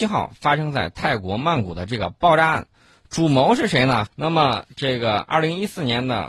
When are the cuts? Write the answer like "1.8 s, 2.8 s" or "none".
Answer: 4.1 s